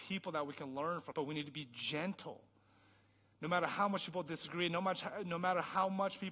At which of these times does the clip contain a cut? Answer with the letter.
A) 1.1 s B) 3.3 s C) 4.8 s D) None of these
A